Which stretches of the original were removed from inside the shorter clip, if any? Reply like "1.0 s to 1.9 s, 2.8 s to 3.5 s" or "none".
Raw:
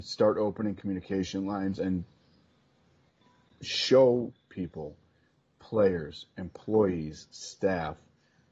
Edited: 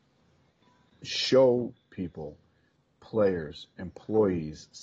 none